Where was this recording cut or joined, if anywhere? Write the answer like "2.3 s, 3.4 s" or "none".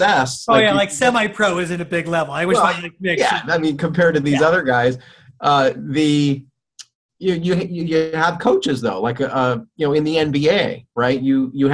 none